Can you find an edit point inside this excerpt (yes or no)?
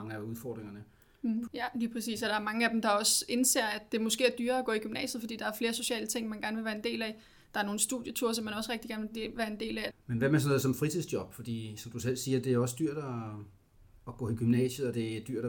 yes